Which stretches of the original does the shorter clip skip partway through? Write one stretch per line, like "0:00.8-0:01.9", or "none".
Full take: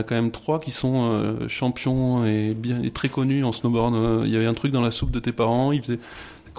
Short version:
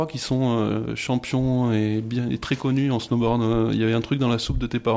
none